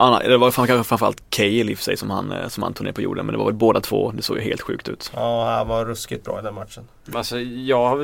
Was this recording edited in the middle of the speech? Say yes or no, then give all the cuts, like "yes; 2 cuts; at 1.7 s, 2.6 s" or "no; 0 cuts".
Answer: yes; 1 cut; at 7.1 s